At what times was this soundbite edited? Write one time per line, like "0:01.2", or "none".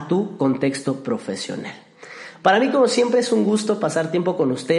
none

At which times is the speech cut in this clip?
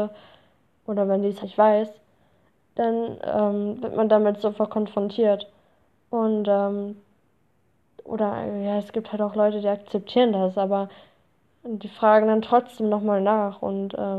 0:01.4

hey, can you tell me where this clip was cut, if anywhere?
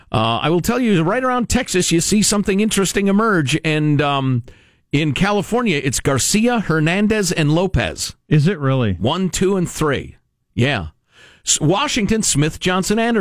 none

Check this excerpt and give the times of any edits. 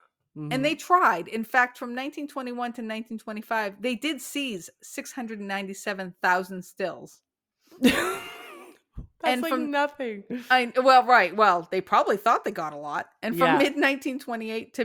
none

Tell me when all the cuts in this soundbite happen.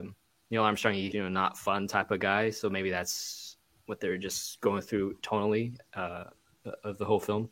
0:01.1

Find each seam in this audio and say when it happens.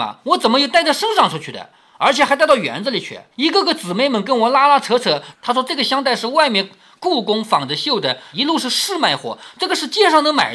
0:03.3
0:05.3
0:08.3

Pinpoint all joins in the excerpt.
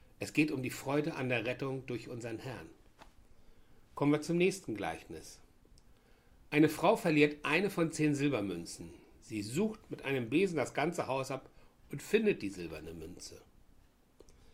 none

